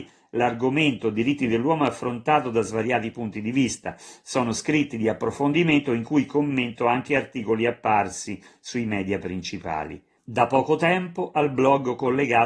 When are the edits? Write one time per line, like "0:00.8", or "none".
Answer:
none

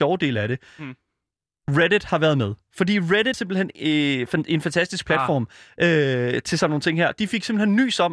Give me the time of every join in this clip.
0:03.3

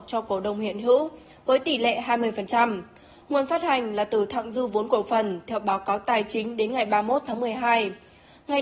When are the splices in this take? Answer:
none

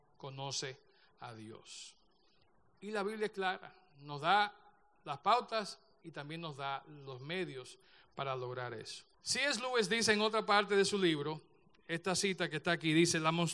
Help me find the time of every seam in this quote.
0:09.1

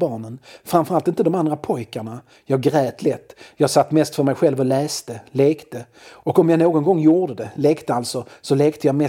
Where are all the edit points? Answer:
none

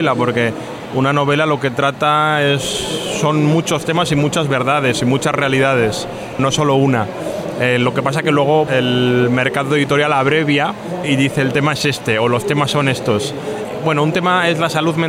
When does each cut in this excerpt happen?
0:08.7

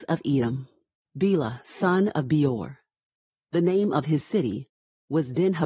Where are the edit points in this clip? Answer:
0:01.0

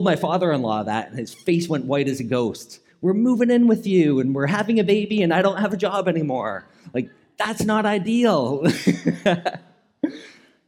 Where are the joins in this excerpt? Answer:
none

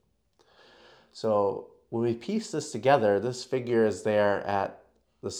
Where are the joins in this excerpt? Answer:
none

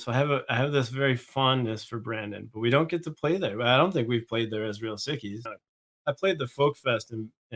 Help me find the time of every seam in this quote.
0:05.5

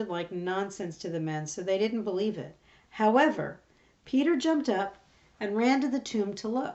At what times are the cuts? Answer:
none

